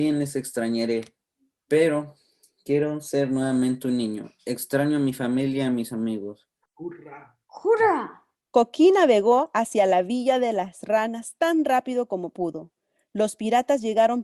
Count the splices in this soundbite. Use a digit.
1